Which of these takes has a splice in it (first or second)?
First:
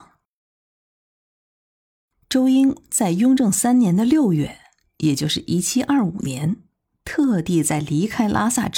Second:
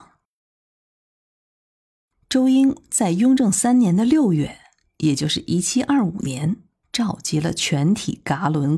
second